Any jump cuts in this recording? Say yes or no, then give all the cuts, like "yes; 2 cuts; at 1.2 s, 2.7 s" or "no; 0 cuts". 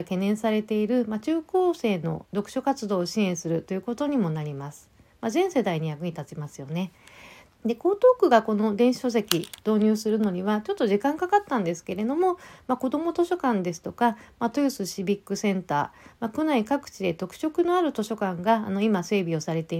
yes; 1 cut; at 7.5 s